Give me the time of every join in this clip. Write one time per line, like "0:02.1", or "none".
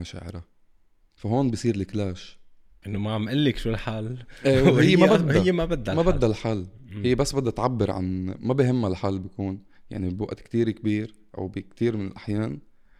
0:02.8